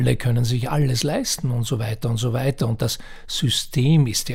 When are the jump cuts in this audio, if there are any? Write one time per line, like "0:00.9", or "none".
none